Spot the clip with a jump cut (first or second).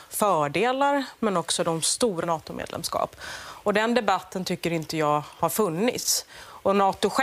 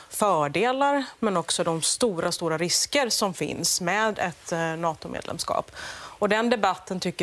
first